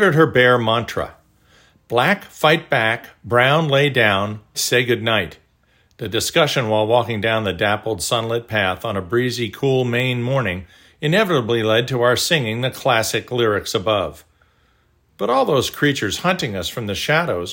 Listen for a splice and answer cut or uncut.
cut